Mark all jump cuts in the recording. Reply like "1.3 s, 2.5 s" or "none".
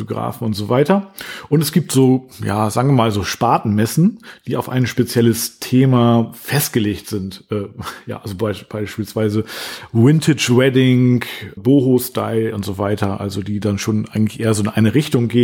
11.6 s